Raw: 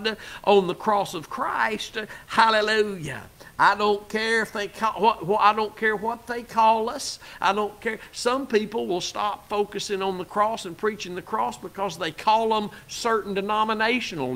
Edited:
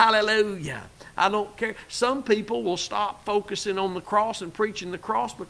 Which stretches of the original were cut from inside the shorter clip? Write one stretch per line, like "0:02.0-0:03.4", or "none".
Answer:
0:03.5-0:07.4

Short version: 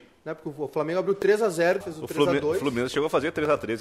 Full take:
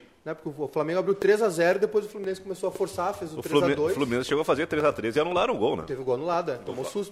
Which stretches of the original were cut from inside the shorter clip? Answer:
0:01.8-0:03.1

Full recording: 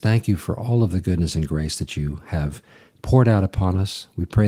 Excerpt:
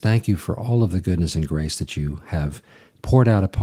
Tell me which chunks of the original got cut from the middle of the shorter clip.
none

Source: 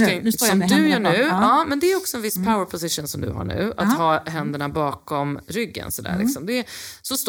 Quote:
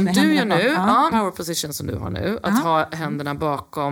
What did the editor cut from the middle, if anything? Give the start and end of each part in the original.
0:01.7-0:02.5

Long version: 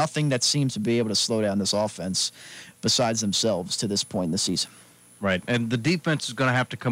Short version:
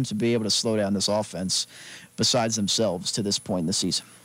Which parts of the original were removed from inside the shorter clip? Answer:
none

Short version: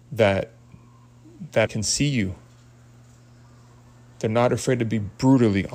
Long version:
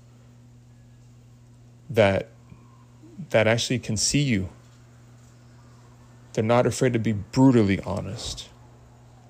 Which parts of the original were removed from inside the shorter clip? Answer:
0:03.4-0:03.8

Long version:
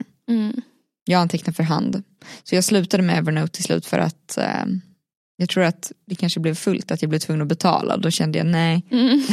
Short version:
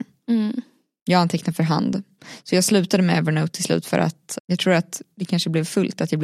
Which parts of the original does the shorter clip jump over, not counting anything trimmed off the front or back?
0:04.4-0:05.3

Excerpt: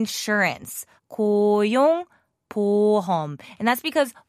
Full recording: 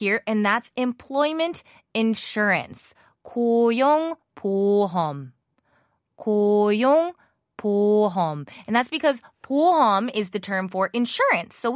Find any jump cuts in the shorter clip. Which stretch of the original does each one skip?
0:03.0-0:06.0

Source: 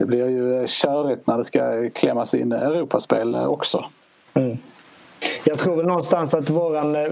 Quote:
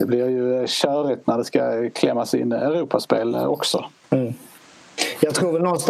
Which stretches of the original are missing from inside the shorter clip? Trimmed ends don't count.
0:04.0-0:04.2

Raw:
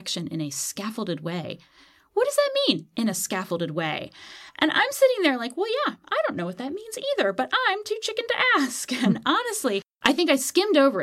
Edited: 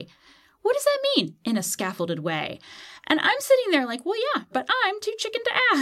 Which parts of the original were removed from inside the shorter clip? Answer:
0:06.0-0:07.3

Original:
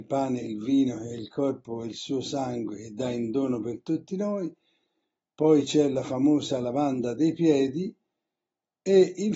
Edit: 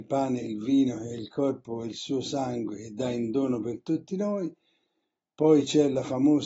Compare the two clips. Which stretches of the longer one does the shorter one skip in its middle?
none

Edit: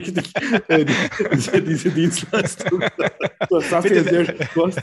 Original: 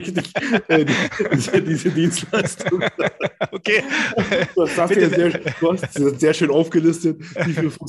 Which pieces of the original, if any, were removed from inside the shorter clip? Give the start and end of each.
0:03.5-0:04.5

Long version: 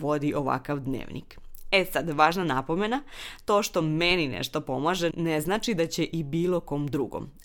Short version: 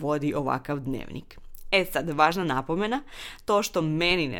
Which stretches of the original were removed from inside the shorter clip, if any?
none

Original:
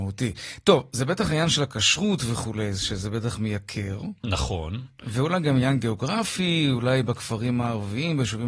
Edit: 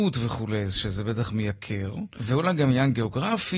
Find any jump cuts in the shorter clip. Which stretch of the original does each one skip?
0:04.2-0:05.0

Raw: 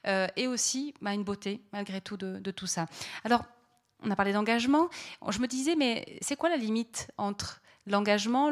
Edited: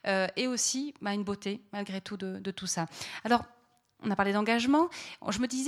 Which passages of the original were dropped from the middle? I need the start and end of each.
none

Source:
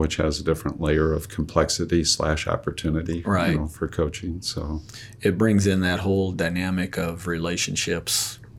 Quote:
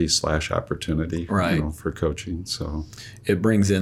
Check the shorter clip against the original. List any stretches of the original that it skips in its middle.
none

